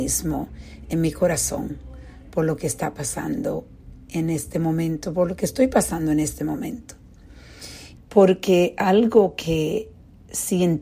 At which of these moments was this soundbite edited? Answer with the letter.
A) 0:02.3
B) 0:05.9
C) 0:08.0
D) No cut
C